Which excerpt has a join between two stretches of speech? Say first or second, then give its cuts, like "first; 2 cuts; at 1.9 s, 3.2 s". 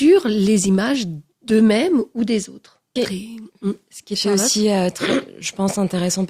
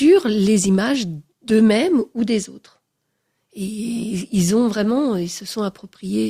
first; 1 cut; at 3.0 s